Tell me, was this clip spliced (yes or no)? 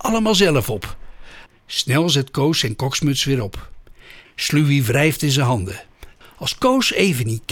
yes